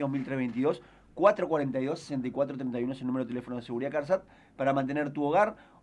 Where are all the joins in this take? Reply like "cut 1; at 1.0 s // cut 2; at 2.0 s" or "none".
none